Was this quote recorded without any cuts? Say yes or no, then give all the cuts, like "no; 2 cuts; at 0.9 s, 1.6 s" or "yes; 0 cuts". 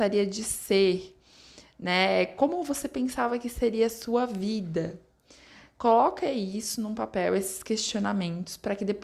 yes; 0 cuts